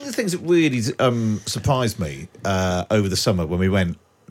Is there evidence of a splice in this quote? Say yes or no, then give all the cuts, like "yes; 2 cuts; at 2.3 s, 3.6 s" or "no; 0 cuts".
no; 0 cuts